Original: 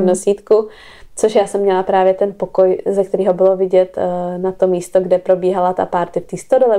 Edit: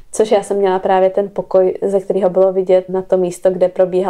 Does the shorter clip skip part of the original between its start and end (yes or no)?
yes